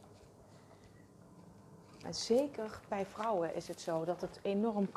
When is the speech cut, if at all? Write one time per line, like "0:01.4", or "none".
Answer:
0:02.0